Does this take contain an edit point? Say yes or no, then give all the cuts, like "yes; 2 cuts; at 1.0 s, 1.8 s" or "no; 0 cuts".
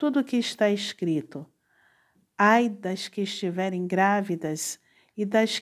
no; 0 cuts